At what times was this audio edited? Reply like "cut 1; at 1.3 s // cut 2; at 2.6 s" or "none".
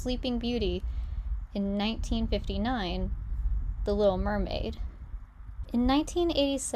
cut 1; at 5.6 s